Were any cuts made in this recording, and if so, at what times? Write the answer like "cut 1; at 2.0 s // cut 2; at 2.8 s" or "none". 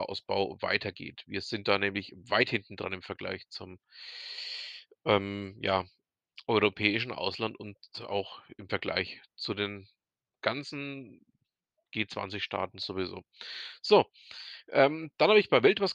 none